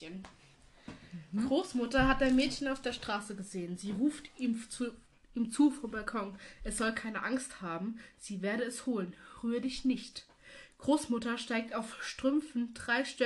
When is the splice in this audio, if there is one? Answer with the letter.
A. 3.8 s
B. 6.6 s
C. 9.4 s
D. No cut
D